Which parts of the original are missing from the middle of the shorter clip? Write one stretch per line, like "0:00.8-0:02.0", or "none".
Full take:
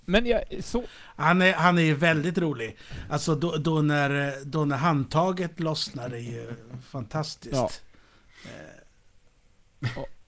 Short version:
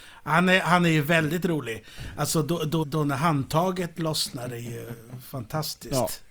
0:03.7-0:04.4